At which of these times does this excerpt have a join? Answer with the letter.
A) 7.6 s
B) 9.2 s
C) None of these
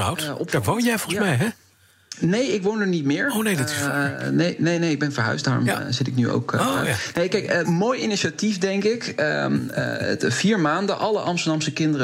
A